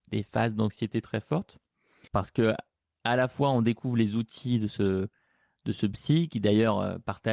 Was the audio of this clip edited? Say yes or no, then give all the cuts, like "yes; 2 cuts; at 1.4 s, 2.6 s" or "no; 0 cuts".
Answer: yes; 1 cut; at 2.1 s